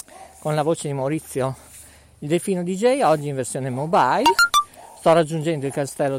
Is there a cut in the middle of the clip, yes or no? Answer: no